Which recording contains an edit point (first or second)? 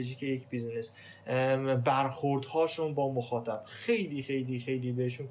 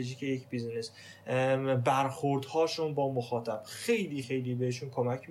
second